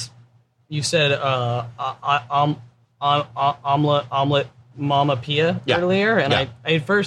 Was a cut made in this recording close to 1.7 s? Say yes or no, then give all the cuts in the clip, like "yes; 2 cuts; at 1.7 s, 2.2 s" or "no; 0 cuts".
no; 0 cuts